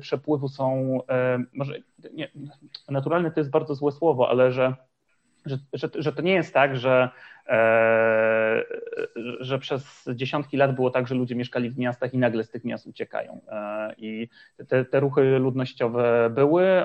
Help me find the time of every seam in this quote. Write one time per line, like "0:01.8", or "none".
none